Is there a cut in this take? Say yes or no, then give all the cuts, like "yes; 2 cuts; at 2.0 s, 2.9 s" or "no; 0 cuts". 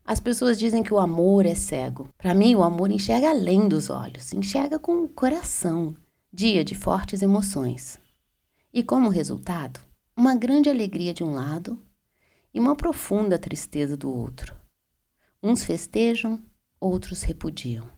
yes; 2 cuts; at 2.1 s, 6.2 s